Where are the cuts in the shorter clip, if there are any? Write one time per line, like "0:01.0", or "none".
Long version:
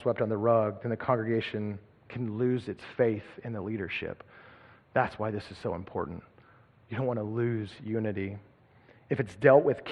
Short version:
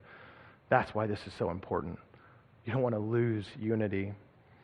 none